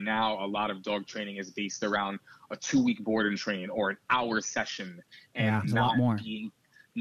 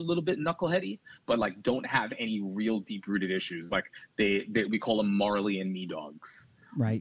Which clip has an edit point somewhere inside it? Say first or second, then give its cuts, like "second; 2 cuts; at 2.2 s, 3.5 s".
first; 1 cut; at 5.6 s